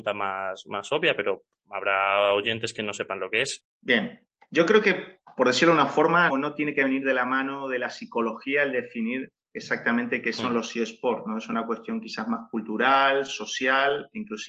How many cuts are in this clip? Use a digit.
2